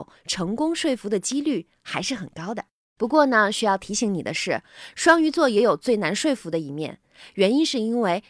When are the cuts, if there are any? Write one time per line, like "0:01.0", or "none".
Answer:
none